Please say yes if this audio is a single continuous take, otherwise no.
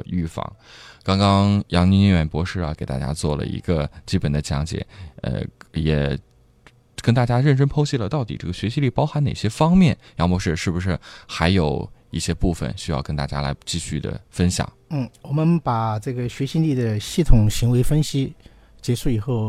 no